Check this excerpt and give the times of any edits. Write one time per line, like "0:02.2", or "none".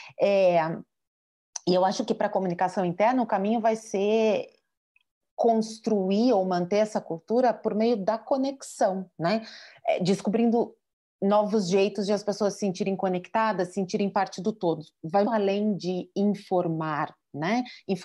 0:15.2